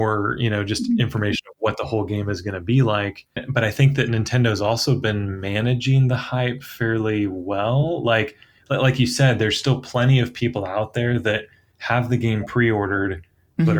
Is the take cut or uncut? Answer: cut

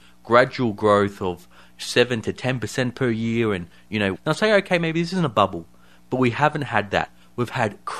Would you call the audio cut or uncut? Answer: cut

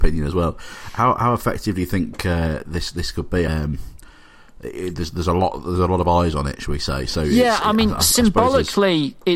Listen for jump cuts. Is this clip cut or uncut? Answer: cut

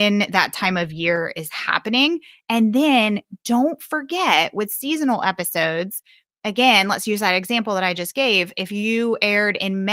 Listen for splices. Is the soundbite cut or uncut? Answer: uncut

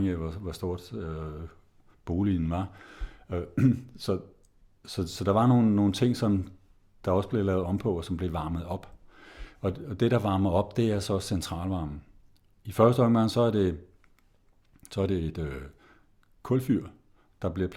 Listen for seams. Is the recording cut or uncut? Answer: uncut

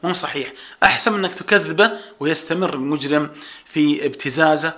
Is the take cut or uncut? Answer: uncut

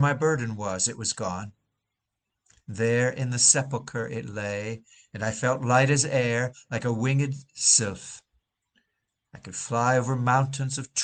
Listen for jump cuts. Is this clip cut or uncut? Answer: uncut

